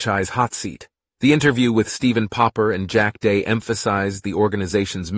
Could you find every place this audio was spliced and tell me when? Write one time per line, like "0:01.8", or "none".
0:01.1